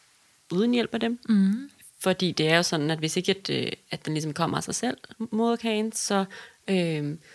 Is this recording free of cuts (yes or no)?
yes